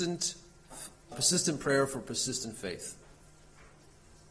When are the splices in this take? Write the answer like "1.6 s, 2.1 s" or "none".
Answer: 1.1 s